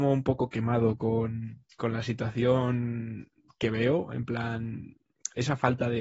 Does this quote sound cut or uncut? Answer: uncut